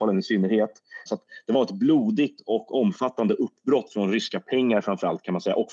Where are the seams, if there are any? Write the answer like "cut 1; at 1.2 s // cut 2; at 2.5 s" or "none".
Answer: cut 1; at 1.1 s

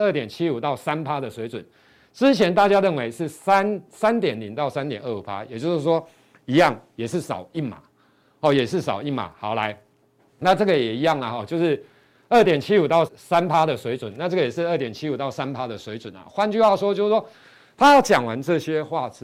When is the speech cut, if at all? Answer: cut 1; at 13.1 s

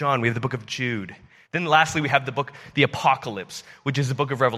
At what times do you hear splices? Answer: cut 1; at 1.4 s

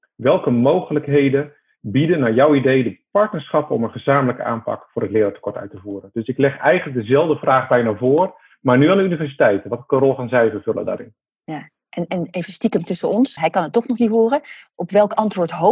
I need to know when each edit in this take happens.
cut 1; at 13.4 s

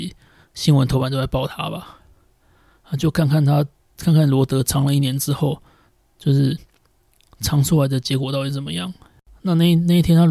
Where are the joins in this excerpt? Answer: none

